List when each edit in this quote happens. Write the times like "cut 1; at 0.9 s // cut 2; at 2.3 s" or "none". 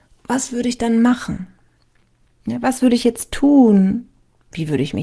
none

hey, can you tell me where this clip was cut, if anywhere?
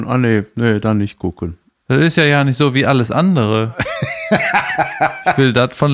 none

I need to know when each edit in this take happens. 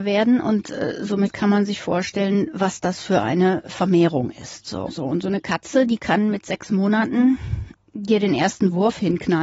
cut 1; at 4.9 s

